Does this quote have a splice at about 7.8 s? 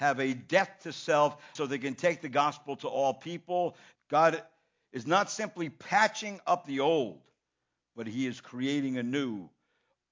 no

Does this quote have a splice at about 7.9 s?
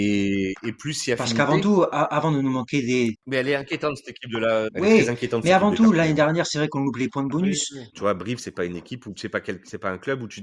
yes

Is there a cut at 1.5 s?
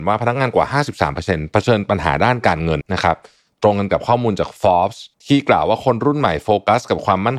no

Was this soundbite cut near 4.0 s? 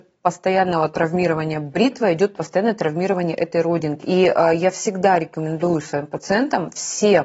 yes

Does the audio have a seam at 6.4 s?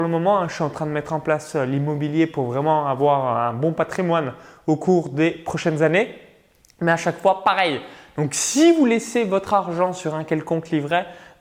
no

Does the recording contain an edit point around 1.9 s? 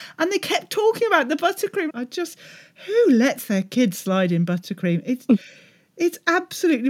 yes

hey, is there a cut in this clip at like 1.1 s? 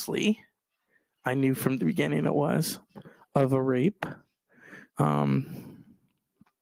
no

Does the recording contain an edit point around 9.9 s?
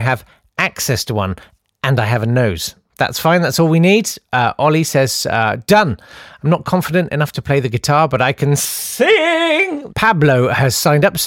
yes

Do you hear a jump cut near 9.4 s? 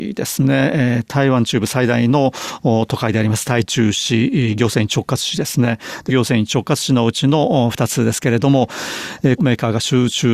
yes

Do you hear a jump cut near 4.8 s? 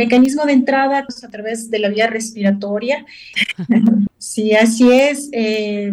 no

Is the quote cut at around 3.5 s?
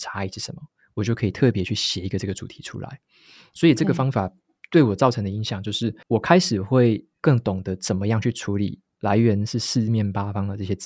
no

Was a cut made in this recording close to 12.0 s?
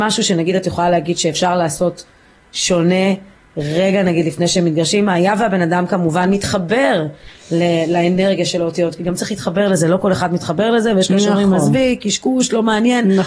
no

